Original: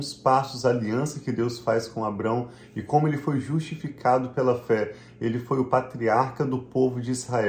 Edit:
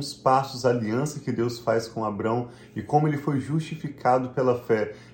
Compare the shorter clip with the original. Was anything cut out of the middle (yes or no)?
no